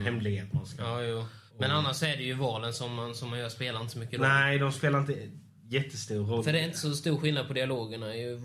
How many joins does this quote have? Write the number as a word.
one